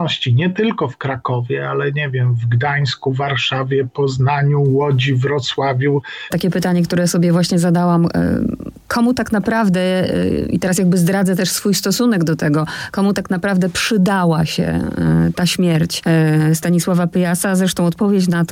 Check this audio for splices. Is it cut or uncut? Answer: cut